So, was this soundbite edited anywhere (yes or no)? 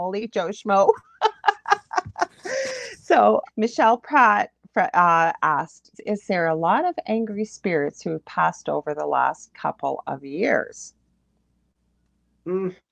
yes